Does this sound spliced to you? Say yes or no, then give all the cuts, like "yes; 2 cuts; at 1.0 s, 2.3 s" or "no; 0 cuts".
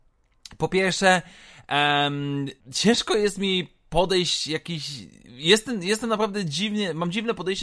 yes; 1 cut; at 2.6 s